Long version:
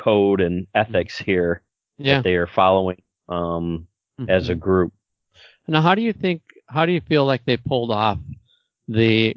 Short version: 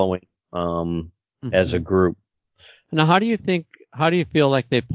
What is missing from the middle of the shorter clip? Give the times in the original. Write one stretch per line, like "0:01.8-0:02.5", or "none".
none